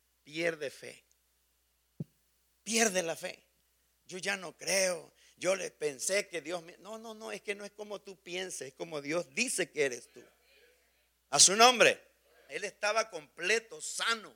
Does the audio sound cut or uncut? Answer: cut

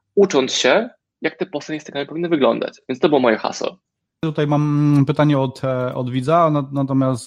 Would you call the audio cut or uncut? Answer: uncut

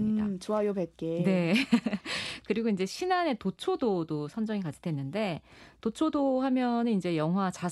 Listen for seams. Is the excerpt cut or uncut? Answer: uncut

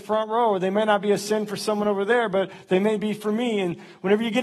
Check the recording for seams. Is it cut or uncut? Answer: uncut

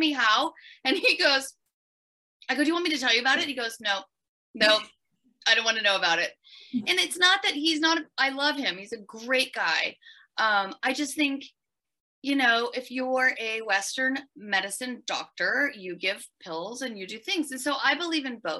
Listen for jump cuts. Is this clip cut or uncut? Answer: uncut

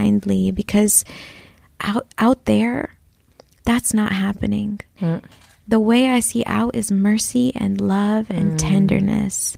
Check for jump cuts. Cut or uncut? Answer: cut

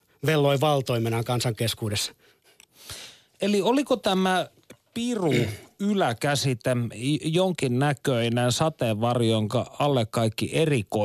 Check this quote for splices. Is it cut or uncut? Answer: uncut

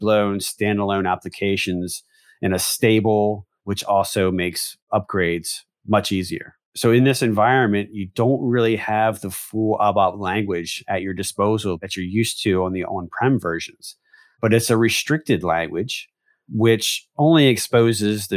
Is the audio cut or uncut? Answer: cut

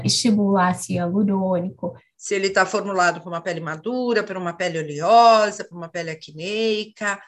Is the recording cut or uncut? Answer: cut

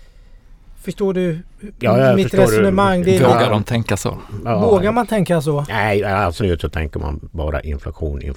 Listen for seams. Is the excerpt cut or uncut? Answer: cut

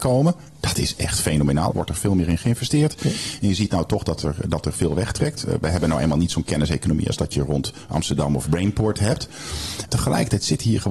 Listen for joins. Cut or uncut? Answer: cut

